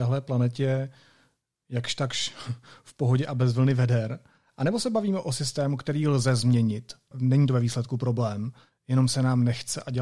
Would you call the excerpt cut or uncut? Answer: uncut